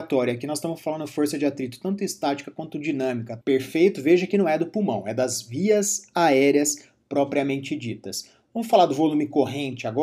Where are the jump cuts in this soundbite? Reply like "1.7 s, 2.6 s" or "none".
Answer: 3.4 s